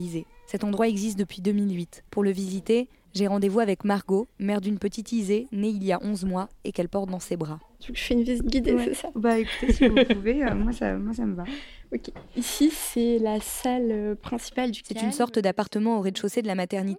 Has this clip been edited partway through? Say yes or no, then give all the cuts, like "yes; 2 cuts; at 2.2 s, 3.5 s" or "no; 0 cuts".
yes; 1 cut; at 2.1 s